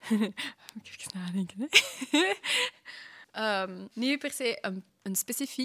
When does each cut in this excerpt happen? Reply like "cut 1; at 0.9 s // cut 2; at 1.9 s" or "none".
none

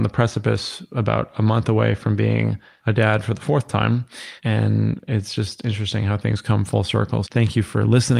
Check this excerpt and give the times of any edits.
cut 1; at 7.3 s

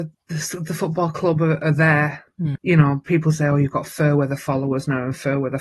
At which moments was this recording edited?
cut 1; at 2.6 s

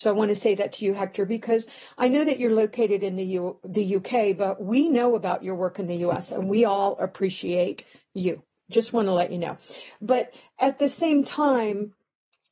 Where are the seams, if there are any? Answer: none

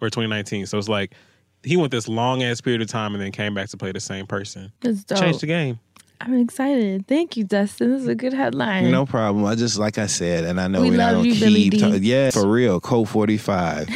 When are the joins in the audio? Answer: cut 1; at 4.8 s // cut 2; at 12.3 s

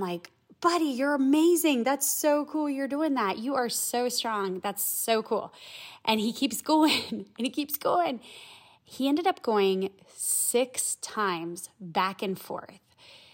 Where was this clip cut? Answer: none

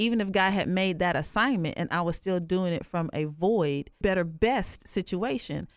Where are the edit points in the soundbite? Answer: cut 1; at 4.0 s

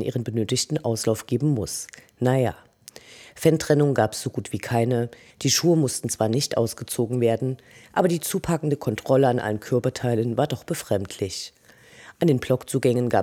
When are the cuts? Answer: cut 1; at 5.3 s

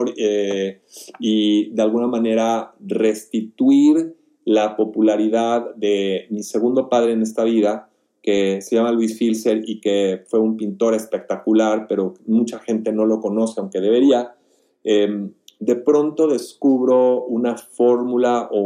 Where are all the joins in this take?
none

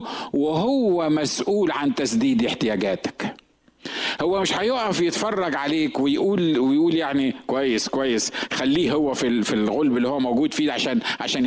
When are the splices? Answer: none

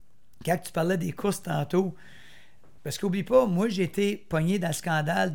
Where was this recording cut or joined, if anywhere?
cut 1; at 2.8 s

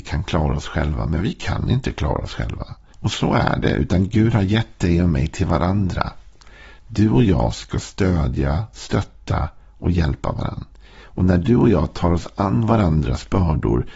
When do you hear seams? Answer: cut 1; at 2.9 s

